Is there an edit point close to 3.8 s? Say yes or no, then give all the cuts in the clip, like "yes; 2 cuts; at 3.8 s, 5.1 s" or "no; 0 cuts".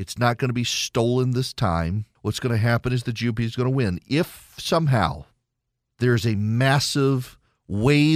no; 2 cuts; at 2.2 s, 5.9 s